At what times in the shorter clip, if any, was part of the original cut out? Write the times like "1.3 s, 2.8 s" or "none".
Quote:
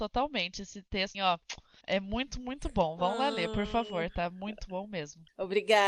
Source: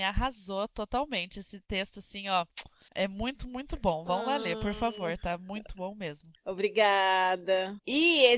1.1 s